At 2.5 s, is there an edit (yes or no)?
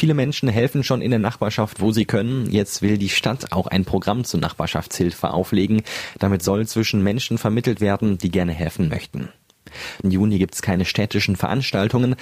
no